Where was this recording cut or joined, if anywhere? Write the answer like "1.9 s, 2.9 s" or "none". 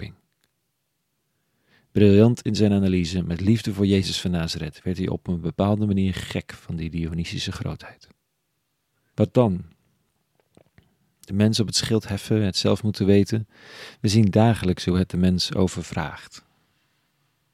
9.1 s